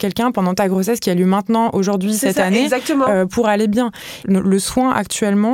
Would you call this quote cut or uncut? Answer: cut